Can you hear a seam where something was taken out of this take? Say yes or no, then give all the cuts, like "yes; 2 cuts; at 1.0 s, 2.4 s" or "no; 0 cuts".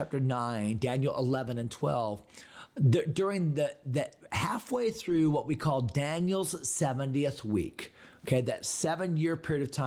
no; 0 cuts